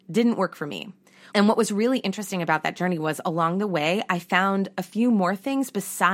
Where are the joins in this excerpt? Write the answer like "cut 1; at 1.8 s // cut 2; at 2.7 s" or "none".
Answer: cut 1; at 1.3 s